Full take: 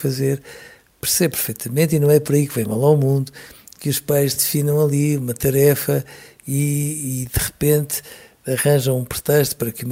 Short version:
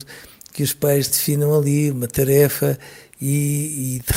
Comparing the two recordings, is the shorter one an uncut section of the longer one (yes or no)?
yes